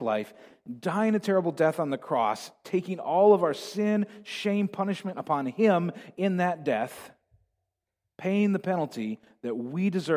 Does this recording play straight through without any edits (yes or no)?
yes